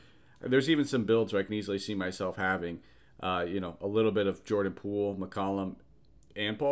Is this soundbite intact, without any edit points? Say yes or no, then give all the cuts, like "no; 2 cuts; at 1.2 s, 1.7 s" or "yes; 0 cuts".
yes; 0 cuts